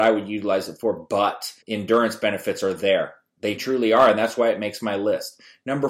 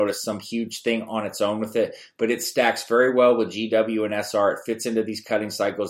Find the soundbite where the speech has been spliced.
first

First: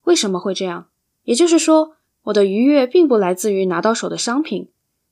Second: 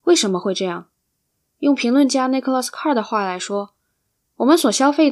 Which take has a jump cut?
first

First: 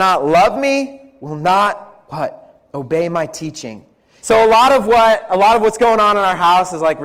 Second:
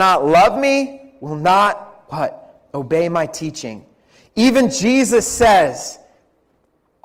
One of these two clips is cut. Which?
first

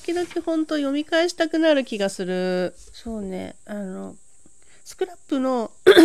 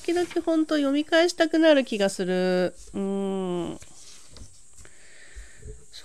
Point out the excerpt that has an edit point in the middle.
first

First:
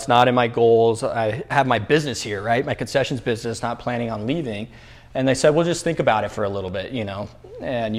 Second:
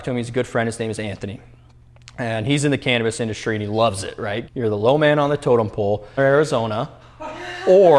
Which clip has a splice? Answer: second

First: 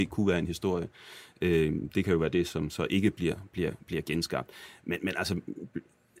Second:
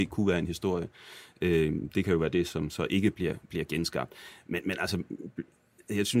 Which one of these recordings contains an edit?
second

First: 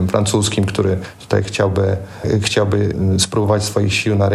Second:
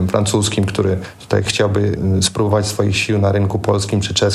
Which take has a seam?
second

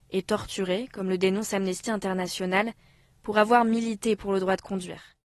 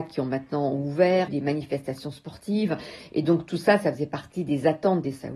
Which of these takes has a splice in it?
second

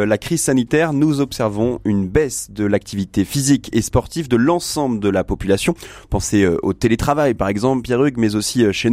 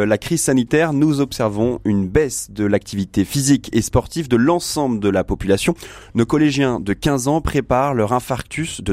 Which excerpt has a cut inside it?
second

